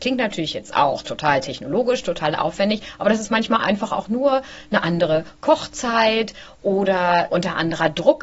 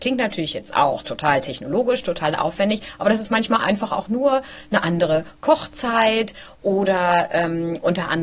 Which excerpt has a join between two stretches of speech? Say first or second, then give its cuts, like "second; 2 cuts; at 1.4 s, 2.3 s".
first; 1 cut; at 7.3 s